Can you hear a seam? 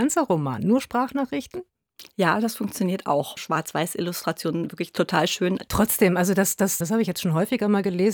yes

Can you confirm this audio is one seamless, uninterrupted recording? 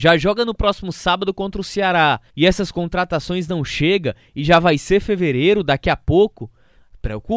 no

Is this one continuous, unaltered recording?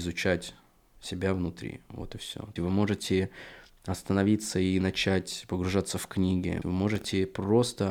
no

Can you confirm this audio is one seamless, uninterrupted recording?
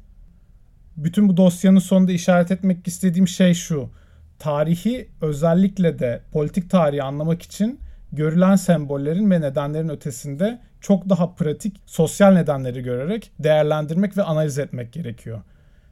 no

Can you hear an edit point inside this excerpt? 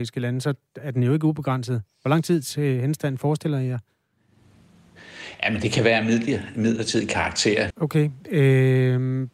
yes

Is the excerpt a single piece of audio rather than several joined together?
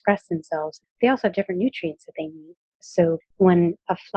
no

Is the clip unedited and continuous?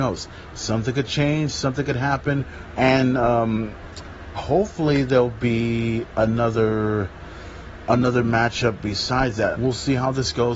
no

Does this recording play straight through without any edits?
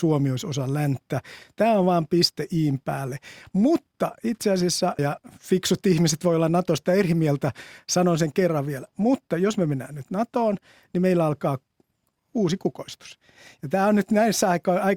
no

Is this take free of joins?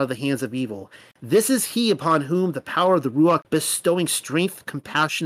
no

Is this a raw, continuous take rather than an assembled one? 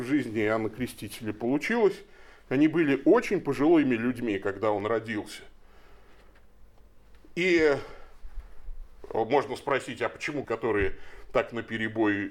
no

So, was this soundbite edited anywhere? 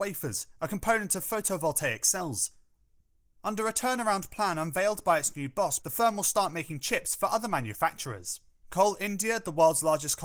yes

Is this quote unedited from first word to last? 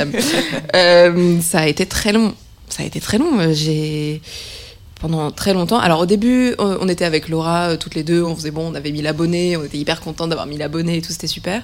yes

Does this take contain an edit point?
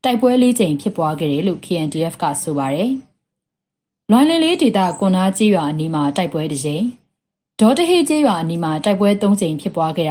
no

